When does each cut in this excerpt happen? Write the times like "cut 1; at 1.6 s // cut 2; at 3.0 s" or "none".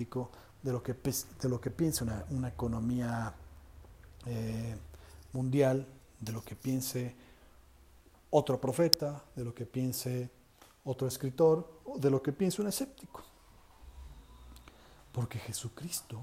none